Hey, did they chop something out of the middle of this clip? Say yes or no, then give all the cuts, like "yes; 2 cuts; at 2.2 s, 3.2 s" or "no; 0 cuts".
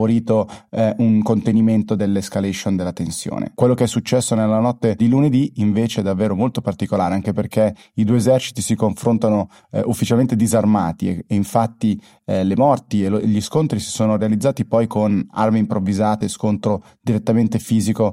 yes; 1 cut; at 16.2 s